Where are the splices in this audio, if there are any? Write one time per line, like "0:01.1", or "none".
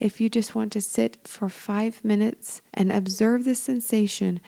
0:02.7